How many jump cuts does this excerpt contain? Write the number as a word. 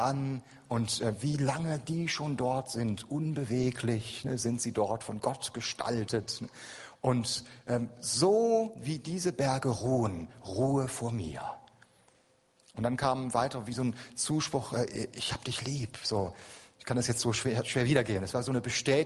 zero